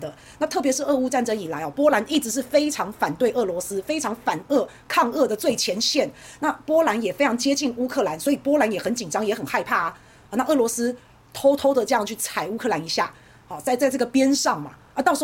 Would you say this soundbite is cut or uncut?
uncut